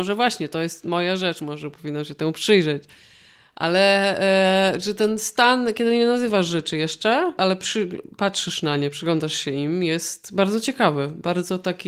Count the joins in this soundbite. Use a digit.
1